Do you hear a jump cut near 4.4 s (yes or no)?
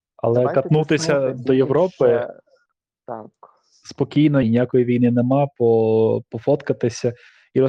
yes